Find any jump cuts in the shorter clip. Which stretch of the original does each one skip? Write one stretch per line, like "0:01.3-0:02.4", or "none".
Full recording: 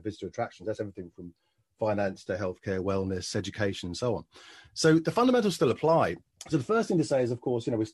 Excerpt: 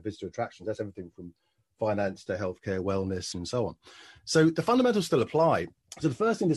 0:03.3-0:03.8